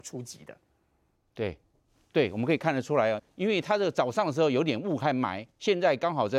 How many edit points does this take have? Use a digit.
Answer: 1